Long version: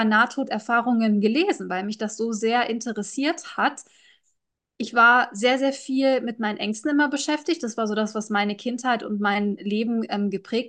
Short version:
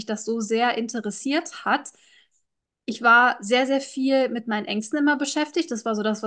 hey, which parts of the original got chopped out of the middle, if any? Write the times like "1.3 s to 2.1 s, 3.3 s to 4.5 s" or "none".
none

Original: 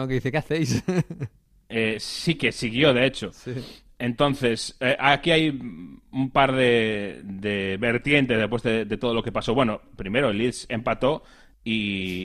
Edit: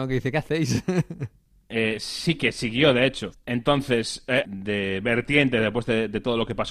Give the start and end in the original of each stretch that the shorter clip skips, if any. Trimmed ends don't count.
3.3 s to 3.9 s, 5.0 s to 7.2 s

